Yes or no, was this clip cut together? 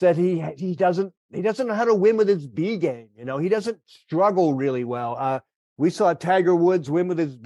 no